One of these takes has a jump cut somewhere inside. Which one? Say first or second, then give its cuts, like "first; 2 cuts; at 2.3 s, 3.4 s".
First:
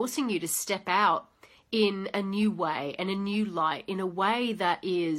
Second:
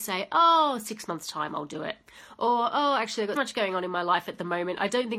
second; 1 cut; at 3.4 s